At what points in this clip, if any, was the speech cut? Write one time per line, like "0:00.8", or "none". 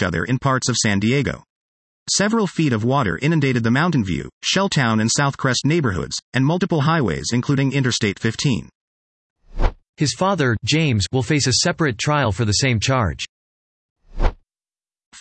0:09.9